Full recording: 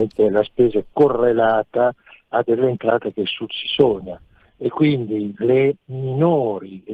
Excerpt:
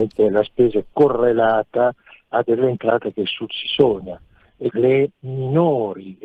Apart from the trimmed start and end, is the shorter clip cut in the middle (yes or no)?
yes